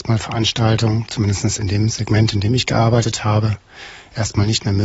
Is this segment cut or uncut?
uncut